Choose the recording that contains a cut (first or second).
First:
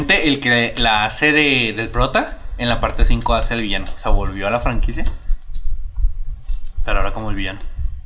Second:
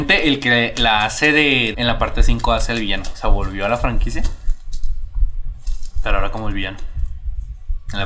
second